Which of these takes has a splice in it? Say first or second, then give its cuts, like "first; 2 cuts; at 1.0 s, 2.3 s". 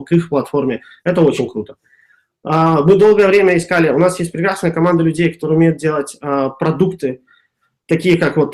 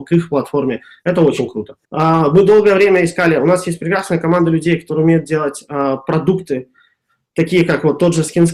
second; 1 cut; at 1.8 s